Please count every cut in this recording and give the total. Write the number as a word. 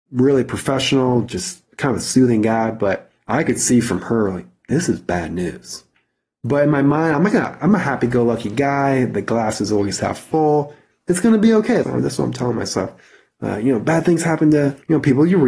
one